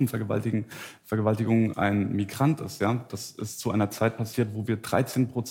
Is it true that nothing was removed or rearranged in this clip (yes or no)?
no